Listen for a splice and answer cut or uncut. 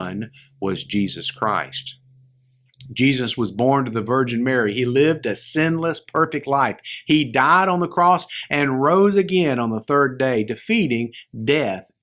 uncut